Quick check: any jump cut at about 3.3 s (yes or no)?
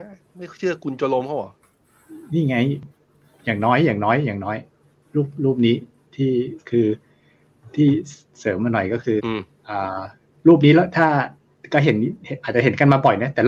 no